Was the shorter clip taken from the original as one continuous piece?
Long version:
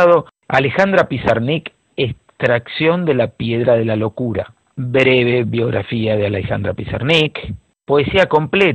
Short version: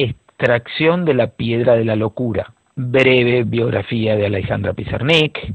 yes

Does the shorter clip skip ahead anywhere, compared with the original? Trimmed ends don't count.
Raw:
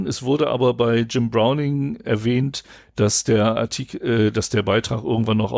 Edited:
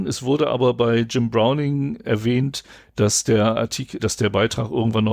yes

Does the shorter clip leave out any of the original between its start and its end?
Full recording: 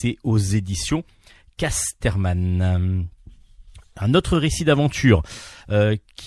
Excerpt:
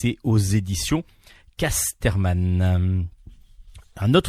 no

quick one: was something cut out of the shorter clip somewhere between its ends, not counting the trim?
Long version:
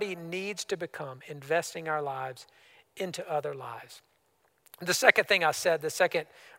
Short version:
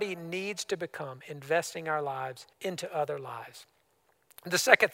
yes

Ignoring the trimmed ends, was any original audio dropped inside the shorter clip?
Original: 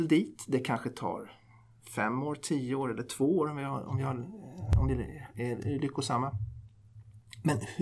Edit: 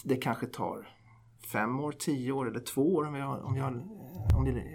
no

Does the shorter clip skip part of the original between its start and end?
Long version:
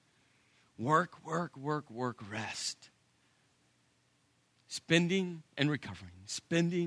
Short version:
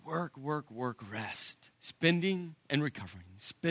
yes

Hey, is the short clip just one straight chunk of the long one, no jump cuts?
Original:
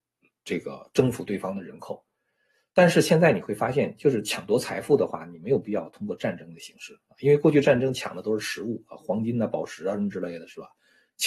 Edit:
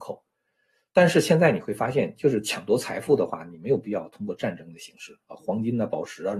no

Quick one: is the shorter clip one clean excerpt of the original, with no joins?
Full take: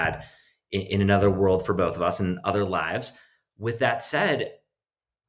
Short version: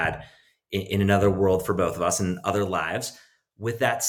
yes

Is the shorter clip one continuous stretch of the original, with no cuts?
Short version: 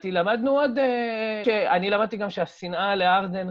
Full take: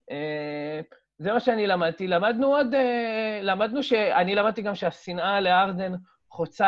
no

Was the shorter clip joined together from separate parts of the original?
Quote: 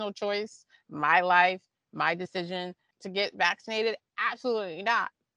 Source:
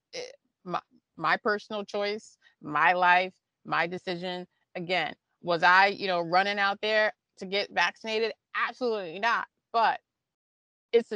yes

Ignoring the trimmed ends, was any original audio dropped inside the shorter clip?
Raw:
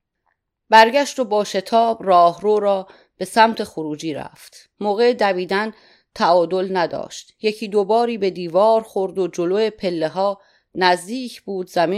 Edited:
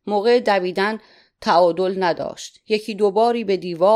no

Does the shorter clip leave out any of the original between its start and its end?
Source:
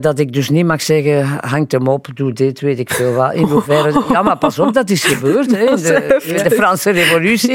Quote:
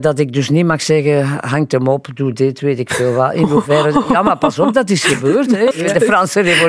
yes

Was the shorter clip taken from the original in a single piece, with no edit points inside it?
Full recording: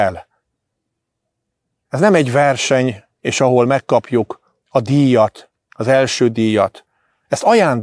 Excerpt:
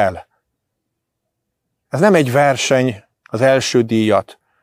no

